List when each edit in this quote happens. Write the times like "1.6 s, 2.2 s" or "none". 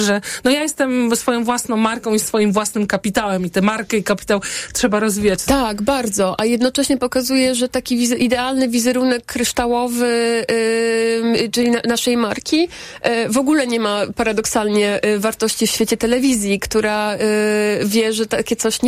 5.5 s

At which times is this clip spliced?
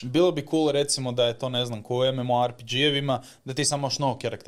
none

